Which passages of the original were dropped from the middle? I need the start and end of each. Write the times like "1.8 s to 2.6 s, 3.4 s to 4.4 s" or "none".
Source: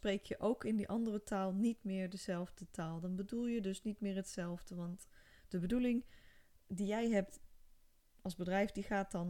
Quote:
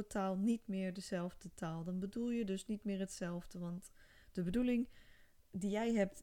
none